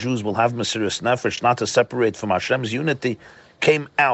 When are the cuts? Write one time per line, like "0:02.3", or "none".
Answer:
none

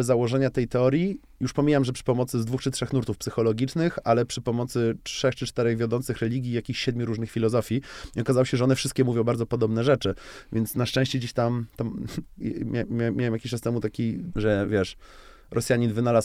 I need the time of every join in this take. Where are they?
0:12.4
0:14.3

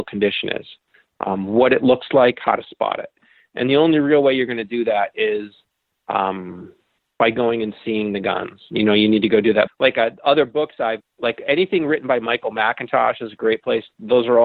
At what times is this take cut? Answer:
0:09.7
0:11.0

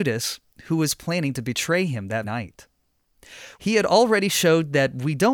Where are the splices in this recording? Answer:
0:02.2
0:03.5

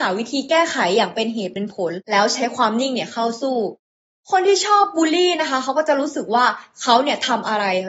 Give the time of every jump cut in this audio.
none

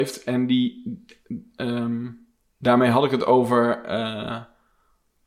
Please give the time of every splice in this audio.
none

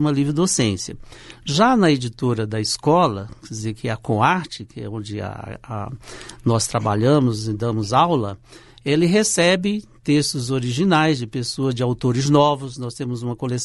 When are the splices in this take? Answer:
none

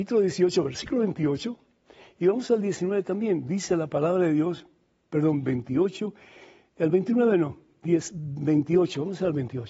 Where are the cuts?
none

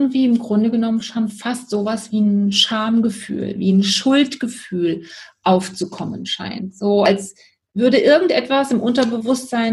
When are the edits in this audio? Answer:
none

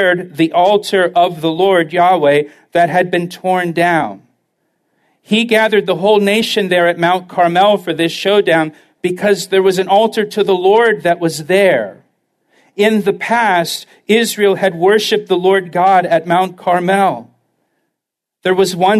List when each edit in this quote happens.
none

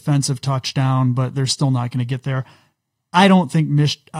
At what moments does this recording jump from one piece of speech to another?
none

